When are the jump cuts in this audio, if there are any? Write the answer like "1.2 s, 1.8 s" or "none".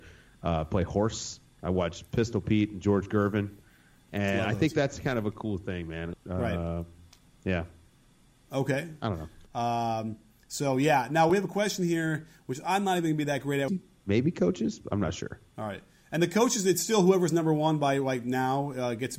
6.1 s, 9.5 s, 13.7 s